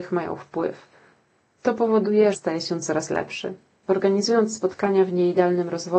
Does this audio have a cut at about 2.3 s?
yes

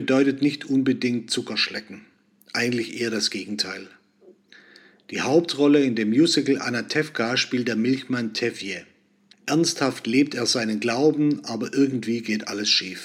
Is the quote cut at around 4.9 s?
no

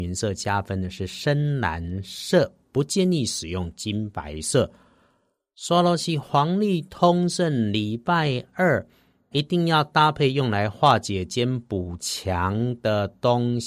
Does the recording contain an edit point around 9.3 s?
yes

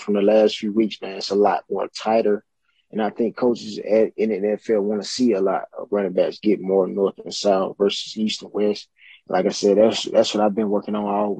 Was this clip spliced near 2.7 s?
no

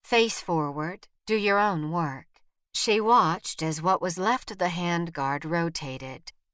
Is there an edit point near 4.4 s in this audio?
no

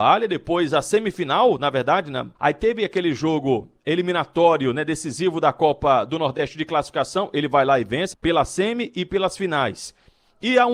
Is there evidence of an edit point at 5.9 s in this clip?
no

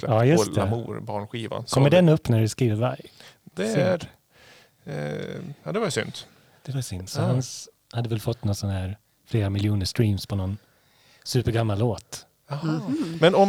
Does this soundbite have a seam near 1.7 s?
no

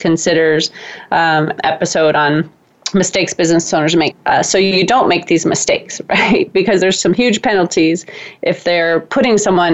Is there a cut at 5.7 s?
no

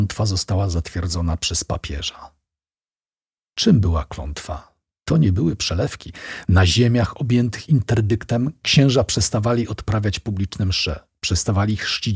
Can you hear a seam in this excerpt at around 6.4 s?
yes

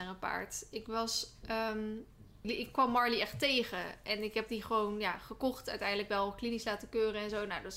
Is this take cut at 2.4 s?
yes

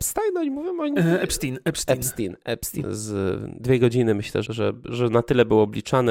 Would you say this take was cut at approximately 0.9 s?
no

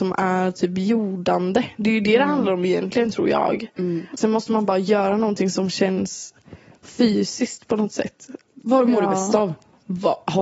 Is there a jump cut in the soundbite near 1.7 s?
no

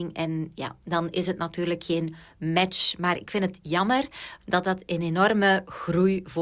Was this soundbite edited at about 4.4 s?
yes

